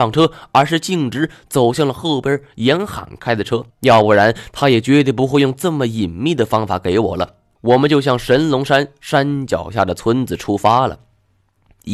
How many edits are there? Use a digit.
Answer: 2